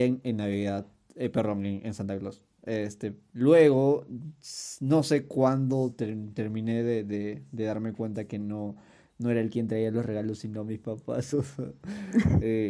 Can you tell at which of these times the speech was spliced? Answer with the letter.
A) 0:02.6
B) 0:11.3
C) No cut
C